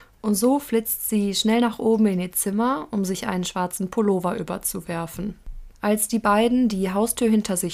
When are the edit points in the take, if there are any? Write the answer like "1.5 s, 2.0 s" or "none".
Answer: 5.7 s